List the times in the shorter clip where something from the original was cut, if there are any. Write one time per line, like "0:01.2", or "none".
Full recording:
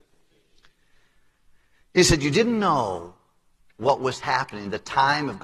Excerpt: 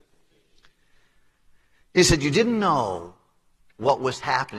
none